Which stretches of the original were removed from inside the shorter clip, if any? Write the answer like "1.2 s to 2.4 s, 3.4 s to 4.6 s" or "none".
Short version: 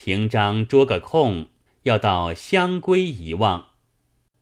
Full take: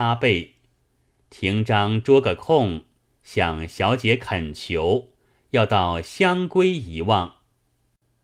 3.0 s to 5.3 s